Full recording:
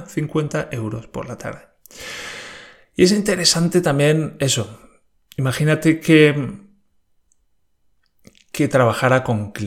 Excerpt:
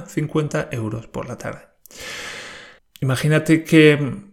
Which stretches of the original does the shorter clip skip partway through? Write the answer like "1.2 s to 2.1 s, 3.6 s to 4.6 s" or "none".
2.8 s to 5.1 s